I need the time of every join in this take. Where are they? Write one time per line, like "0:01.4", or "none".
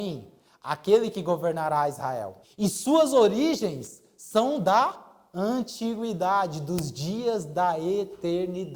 0:02.4